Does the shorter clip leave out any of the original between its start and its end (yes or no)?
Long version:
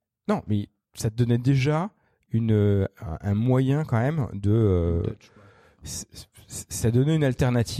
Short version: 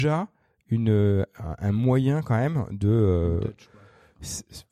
no